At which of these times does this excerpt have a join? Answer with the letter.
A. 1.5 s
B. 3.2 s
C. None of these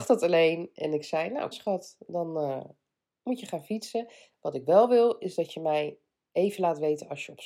A